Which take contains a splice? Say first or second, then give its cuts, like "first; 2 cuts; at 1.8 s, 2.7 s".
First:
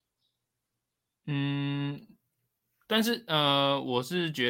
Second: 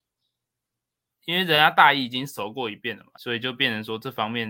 second; 2 cuts; at 1.1 s, 3.1 s